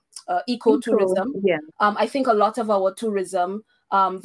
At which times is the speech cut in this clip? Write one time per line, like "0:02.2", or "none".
0:01.7